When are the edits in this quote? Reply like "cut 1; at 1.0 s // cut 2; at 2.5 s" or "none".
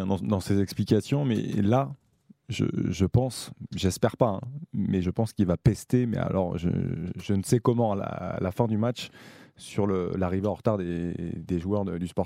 cut 1; at 5.0 s